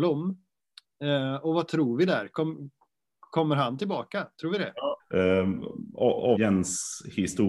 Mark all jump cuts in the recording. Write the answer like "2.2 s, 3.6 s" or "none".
5.0 s, 6.4 s

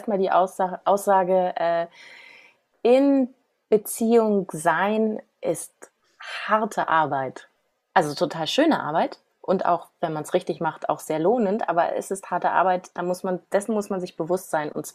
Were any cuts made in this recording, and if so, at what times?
none

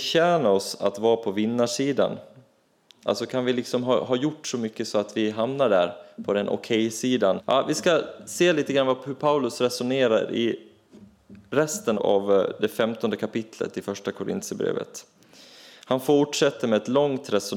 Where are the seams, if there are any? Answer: 7.4 s, 11.9 s

